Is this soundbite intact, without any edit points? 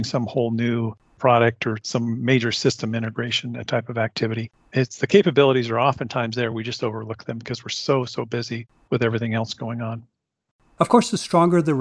yes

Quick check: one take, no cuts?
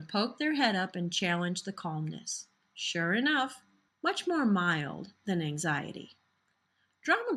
no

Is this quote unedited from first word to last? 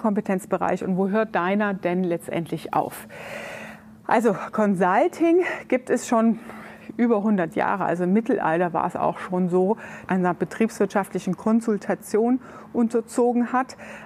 no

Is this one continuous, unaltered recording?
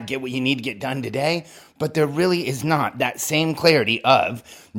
yes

